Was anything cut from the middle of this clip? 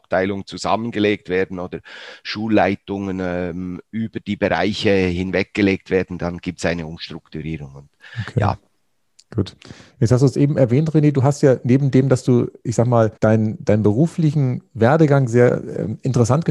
yes; 1 cut; at 13.2 s

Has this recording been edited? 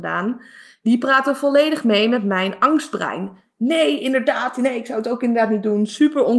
no; 0 cuts

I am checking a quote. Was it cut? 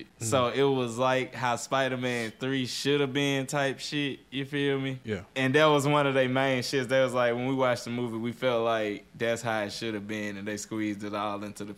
no; 0 cuts

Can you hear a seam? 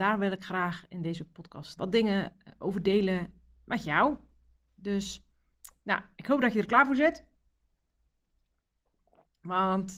yes; 1 cut; at 1.8 s

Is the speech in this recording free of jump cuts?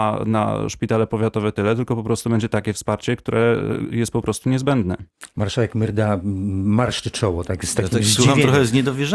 yes; 0 cuts

